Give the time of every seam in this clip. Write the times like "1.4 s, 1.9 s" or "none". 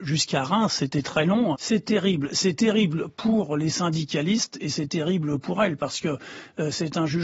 1.5 s